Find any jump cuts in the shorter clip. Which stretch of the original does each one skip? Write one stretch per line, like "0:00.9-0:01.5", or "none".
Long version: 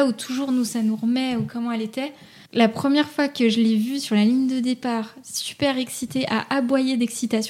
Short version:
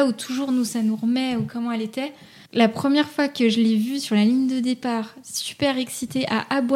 none

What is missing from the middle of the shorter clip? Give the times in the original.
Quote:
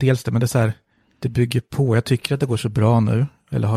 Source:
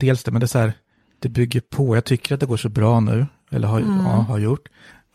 none

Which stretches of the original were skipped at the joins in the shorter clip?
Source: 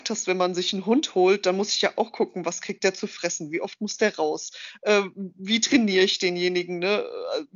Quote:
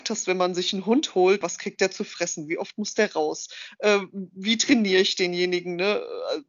0:01.4-0:02.4

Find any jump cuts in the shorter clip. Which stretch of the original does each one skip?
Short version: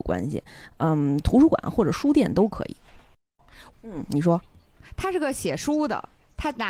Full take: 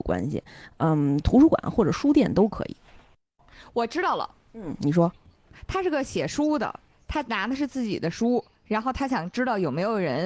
0:03.7-0:04.4

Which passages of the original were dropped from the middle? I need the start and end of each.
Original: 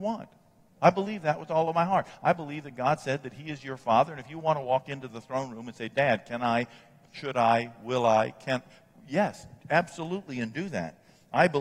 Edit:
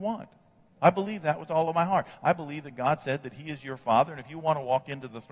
none

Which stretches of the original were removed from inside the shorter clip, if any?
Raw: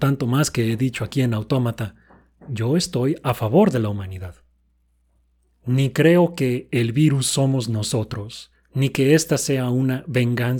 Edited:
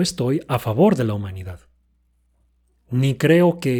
none

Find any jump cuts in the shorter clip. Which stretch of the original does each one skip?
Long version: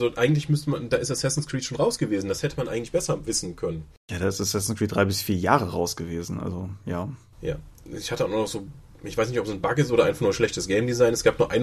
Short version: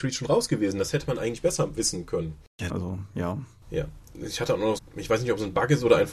0:04.2-0:06.4
0:08.5-0:08.8

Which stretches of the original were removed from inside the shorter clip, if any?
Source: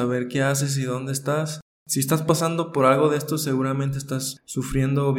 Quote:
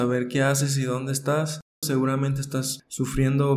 0:01.8-0:03.4

